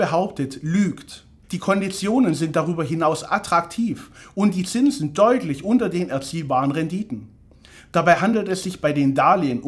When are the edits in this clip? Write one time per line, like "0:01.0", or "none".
0:01.4